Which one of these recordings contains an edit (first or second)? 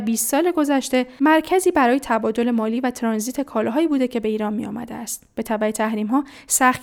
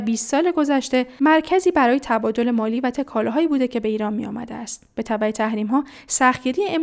second